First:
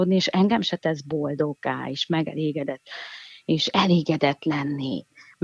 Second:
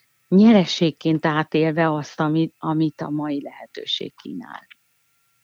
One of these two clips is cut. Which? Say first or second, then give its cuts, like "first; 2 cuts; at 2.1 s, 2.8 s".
first; 1 cut; at 2.8 s